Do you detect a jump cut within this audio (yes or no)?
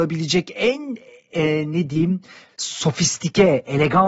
no